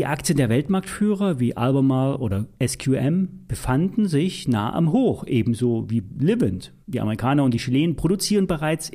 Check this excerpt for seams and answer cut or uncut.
cut